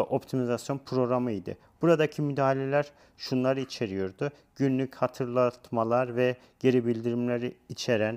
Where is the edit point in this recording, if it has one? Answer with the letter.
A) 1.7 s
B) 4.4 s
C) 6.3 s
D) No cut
D